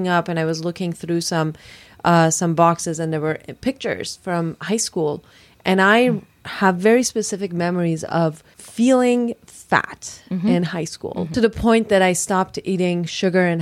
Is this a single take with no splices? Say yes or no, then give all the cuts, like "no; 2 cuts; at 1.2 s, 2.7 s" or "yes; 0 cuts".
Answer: yes; 0 cuts